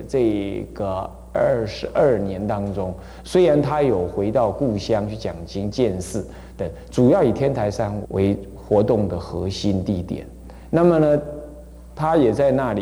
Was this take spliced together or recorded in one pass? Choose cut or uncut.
cut